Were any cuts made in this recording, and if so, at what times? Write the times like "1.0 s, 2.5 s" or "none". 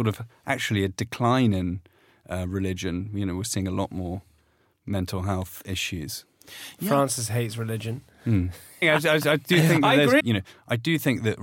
8.8 s, 10.2 s